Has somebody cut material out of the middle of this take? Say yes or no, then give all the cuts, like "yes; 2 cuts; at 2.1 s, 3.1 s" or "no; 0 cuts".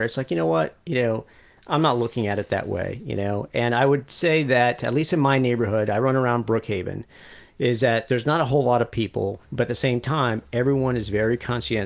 yes; 1 cut; at 9.4 s